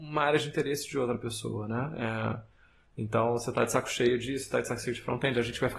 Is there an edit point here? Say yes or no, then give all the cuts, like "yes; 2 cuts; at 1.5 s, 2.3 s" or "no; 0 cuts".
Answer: no; 0 cuts